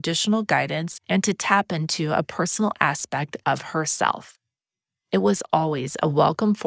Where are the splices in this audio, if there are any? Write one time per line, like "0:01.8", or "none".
none